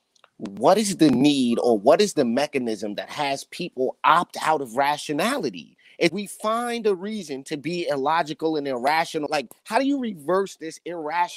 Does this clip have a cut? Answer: yes; 2 cuts; at 6.1 s, 9.3 s

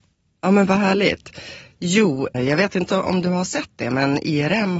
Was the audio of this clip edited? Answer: yes; 1 cut; at 2.3 s

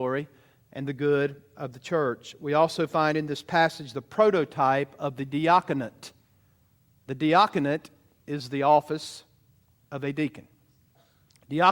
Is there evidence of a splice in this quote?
yes; 1 cut; at 7.0 s

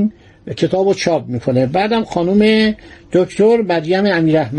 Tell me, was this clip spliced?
no; 0 cuts

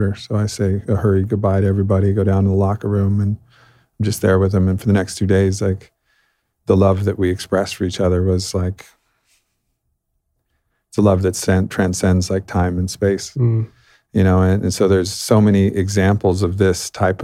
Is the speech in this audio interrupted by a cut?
no; 0 cuts

